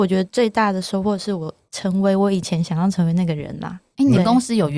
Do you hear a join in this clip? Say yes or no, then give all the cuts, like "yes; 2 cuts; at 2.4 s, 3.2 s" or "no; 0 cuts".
no; 0 cuts